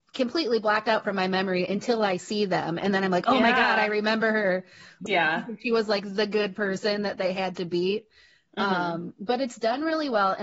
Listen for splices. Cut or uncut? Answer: cut